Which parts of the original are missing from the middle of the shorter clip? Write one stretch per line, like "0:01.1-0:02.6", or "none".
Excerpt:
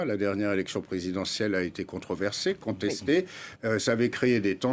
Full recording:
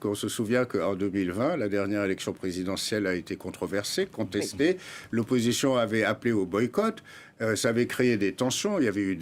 0:05.1-0:07.3